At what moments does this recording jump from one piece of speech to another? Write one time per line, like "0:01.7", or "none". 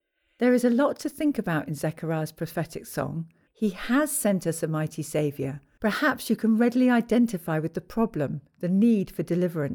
0:03.5
0:05.8